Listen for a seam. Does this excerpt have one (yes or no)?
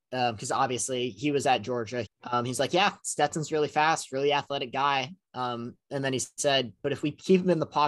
yes